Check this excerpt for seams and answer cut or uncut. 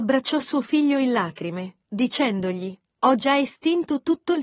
uncut